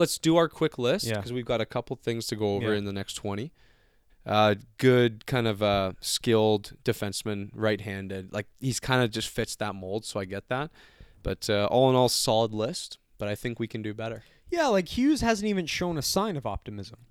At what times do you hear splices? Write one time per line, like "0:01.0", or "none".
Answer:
0:04.1